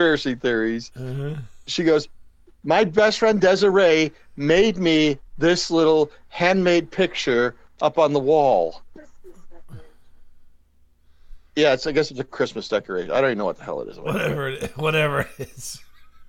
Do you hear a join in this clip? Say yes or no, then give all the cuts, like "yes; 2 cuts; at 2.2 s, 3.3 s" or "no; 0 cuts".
yes; 1 cut; at 11.5 s